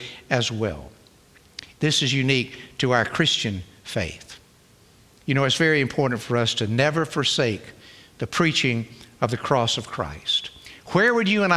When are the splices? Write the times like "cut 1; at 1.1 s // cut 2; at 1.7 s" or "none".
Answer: cut 1; at 1.7 s